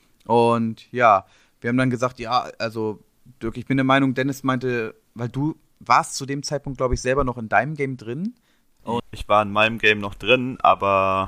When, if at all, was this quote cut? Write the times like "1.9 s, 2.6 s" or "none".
9.0 s

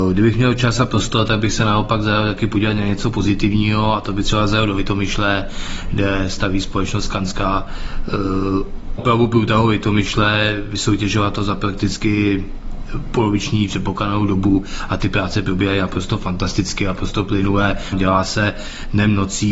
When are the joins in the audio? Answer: 9.0 s, 17.9 s

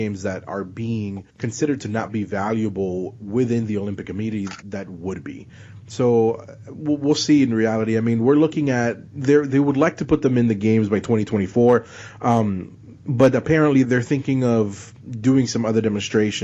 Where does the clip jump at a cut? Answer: 1.3 s, 4.6 s, 13.8 s

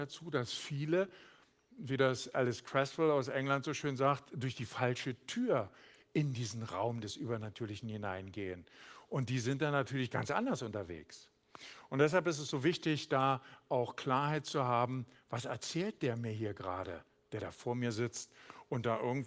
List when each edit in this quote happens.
none

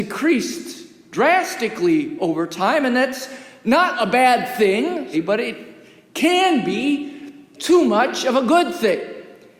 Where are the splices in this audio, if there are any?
5.1 s, 7.6 s

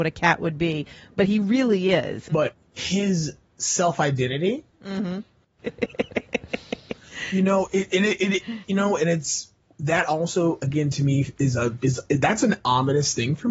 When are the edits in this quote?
2.3 s, 5.6 s

